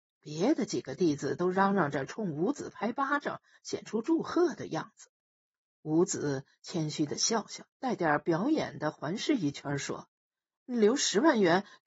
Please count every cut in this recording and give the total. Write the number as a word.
one